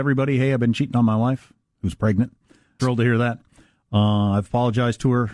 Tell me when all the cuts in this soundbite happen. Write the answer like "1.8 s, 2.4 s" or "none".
2.8 s